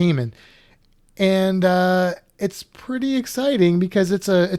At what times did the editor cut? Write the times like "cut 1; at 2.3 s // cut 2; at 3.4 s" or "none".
none